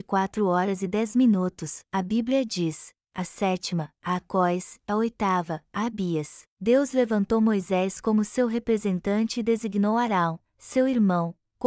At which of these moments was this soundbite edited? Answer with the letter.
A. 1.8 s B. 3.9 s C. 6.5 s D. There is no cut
C